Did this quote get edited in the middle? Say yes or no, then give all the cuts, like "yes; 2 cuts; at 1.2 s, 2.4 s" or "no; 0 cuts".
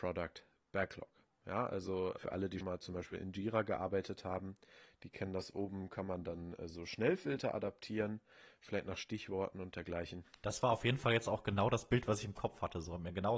yes; 1 cut; at 2.6 s